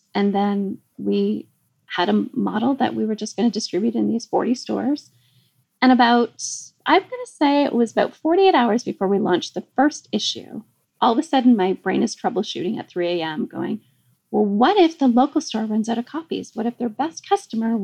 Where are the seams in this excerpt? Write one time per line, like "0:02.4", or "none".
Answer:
none